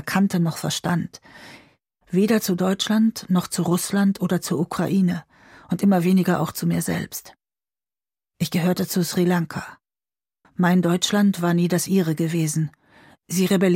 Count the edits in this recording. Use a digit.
2